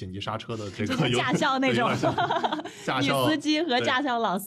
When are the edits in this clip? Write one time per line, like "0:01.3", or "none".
none